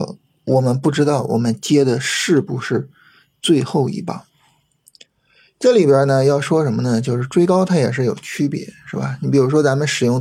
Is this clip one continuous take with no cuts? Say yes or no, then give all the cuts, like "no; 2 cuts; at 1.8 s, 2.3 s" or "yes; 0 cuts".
yes; 0 cuts